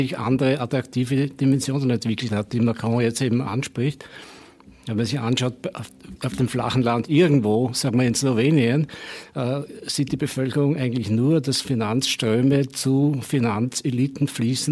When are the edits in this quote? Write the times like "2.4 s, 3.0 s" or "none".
6.2 s